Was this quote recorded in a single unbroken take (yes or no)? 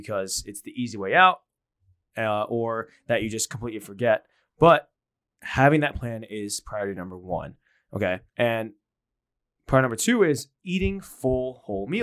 no